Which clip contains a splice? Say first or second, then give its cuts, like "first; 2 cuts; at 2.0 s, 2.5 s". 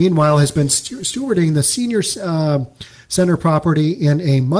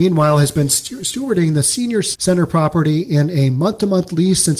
second; 1 cut; at 2.2 s